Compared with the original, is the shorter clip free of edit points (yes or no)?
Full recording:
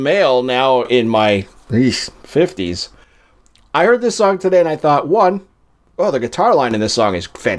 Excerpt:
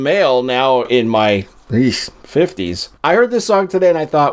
no